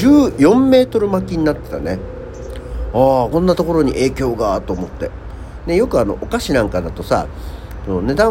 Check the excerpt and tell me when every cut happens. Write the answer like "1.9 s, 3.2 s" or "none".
3.3 s